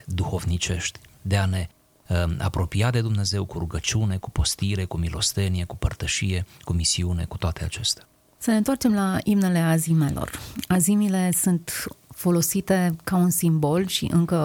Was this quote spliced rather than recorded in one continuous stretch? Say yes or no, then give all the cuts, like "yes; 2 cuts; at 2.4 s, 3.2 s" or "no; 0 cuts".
no; 0 cuts